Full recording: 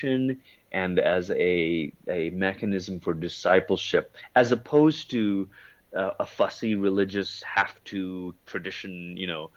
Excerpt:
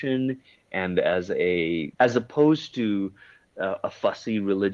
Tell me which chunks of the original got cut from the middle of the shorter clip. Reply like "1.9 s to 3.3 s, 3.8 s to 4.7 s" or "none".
1.9 s to 4.3 s

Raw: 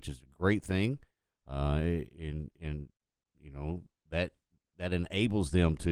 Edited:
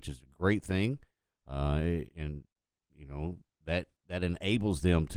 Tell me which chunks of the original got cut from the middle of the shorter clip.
2.1 s to 2.5 s, 4.4 s to 4.7 s

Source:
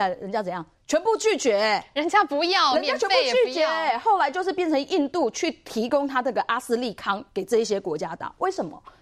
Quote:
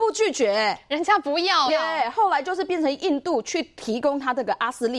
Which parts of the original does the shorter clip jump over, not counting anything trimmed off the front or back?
2.7 s to 3.6 s

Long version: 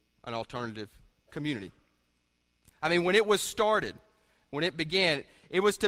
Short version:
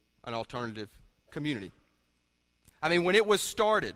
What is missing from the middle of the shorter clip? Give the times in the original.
none

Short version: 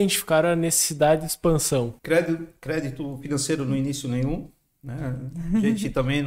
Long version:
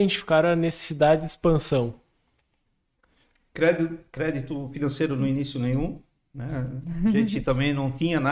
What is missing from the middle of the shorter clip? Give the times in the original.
2.0 s to 3.5 s

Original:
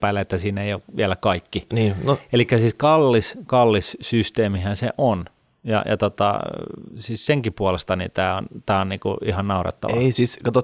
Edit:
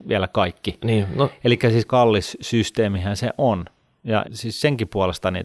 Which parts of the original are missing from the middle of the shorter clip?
2.7 s to 3.5 s, 5.8 s to 6.9 s

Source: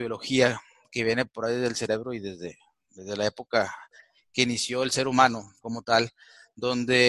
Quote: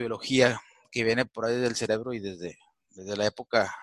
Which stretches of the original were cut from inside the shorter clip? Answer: none

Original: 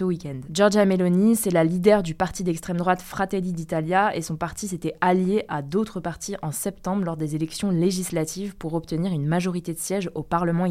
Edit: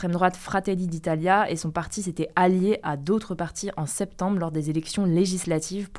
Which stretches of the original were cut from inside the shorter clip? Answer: none

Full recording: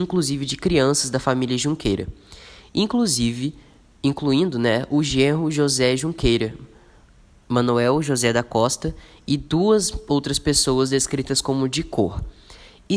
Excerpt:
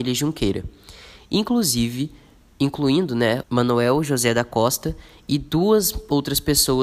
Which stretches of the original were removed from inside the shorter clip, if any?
4.9 s to 7.4 s

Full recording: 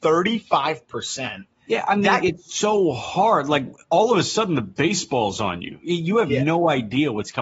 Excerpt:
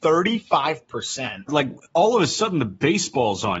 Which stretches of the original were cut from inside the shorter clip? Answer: 1.5 s to 3.4 s

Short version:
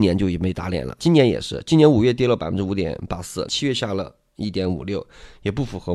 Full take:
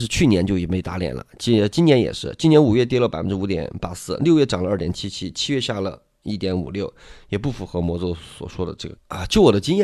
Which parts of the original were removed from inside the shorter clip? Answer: 1.3 s to 1.7 s, 4.2 s to 5.3 s

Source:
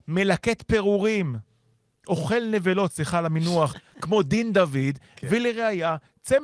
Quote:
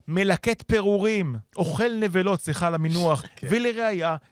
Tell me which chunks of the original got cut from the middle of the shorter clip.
1.5 s to 2.0 s, 3.8 s to 5.1 s

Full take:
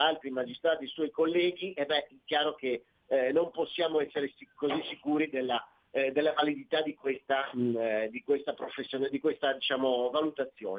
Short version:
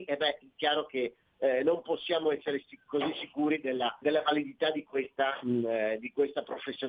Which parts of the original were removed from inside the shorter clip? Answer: 5.7 s to 6.1 s

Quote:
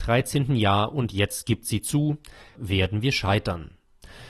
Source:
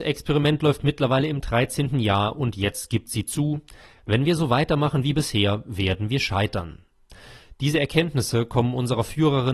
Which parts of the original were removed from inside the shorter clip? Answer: 4.0 s to 5.6 s

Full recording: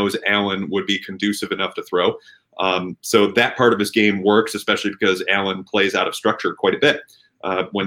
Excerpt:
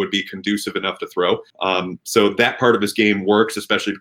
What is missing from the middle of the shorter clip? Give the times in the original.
2.3 s to 2.5 s

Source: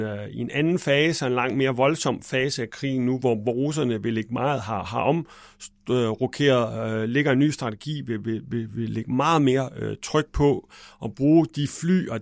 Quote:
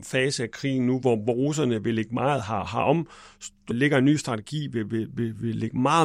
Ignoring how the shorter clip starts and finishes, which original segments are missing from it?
5.9 s to 7.0 s

